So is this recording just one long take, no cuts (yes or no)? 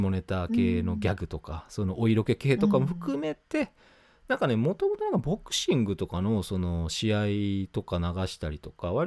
yes